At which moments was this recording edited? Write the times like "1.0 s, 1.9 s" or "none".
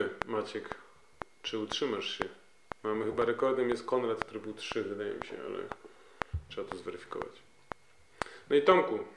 none